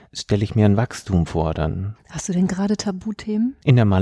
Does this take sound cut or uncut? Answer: uncut